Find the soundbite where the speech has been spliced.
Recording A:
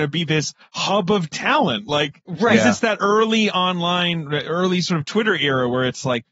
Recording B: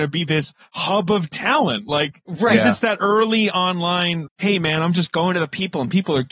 B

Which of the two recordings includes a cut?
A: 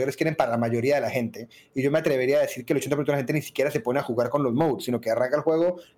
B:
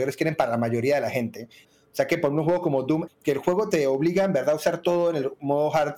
B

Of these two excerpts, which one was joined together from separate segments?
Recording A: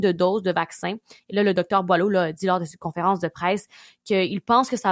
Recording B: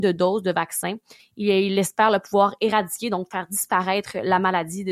B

